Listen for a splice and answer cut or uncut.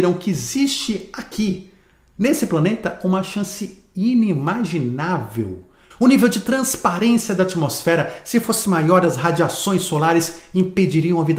cut